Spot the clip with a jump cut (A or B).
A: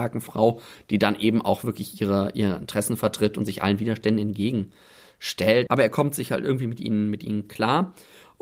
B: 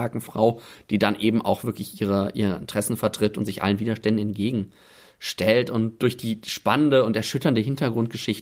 A